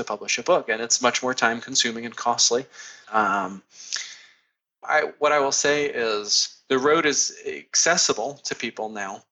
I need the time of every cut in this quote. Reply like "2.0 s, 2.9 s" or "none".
3.0 s, 4.8 s

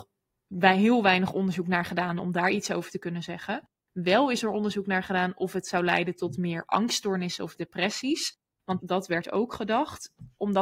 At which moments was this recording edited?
8.8 s

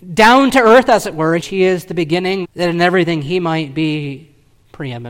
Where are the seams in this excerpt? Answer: 1.4 s, 2.4 s

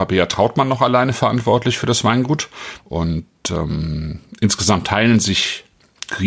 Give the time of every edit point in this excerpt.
2.8 s

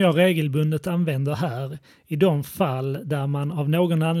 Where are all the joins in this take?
none

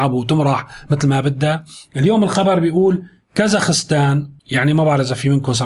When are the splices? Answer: 4.4 s

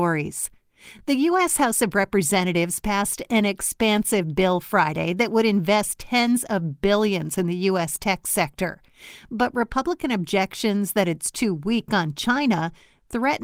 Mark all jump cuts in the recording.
none

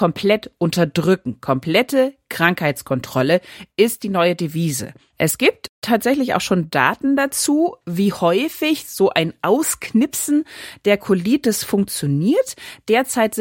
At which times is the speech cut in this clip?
5.1 s

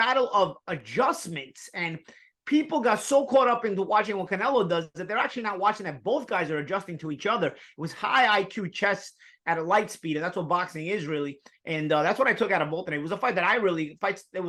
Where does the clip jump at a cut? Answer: none

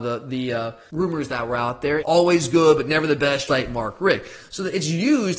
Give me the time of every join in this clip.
2.0 s, 3.5 s

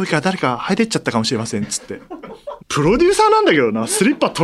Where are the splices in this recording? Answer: 2.6 s

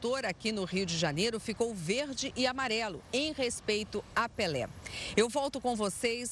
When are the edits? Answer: none

